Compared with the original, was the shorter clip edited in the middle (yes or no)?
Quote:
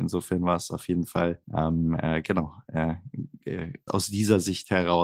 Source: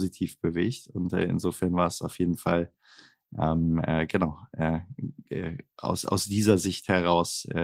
yes